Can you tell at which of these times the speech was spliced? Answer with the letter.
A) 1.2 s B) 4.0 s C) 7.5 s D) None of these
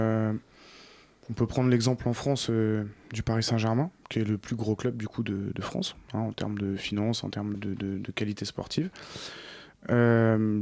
C